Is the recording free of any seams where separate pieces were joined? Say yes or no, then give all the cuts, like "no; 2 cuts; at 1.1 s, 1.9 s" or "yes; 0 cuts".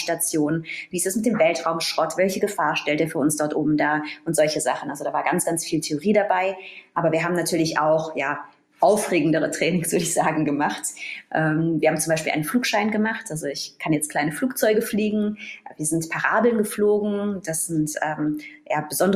yes; 0 cuts